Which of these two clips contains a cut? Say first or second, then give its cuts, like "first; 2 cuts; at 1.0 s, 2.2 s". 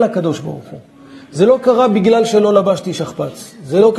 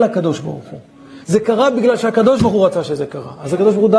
second; 1 cut; at 1.2 s